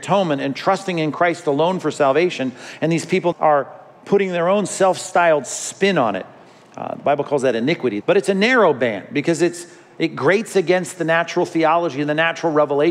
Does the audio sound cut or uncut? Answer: cut